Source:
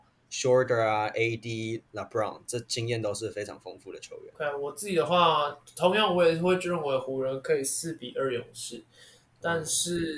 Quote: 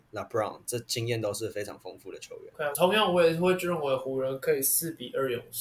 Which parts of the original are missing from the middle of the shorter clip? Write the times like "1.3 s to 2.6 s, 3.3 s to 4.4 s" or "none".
4.5 s to 5.7 s